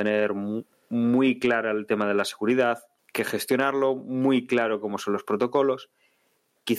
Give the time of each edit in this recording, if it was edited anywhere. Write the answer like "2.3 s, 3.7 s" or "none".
3.0 s